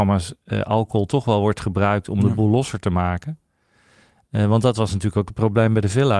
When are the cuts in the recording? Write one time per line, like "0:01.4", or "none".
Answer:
none